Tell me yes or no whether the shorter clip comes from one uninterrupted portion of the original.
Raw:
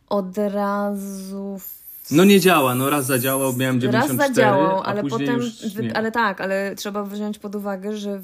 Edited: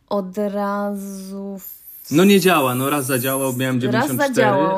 yes